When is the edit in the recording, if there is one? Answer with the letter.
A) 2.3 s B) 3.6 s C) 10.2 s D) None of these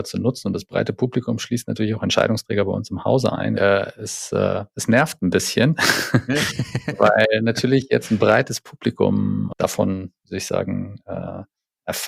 B